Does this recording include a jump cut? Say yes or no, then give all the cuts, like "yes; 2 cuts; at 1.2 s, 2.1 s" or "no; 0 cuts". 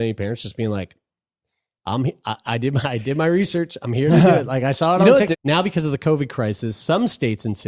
yes; 1 cut; at 5.3 s